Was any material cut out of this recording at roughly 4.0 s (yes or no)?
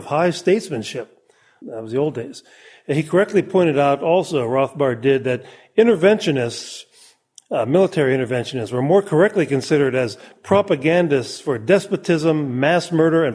no